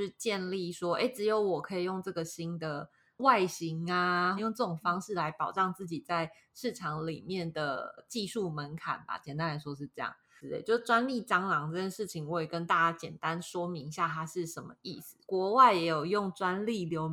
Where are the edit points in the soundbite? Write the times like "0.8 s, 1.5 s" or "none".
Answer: 4.4 s